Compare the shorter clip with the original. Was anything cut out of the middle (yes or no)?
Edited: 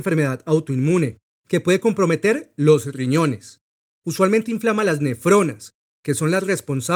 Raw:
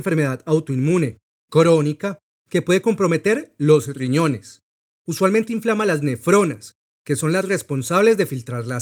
yes